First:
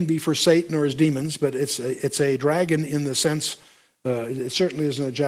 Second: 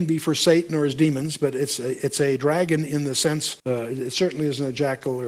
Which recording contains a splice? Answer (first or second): second